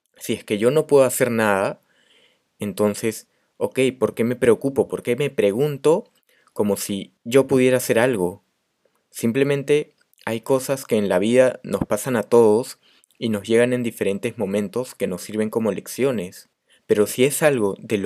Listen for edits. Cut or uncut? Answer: uncut